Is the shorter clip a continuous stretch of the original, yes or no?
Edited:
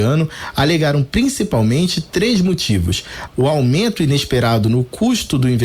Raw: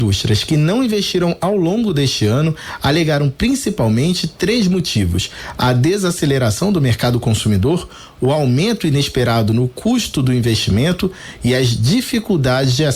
no